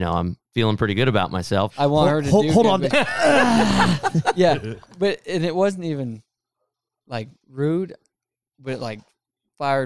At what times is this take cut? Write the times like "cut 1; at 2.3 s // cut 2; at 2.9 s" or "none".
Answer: cut 1; at 1.7 s // cut 2; at 2.9 s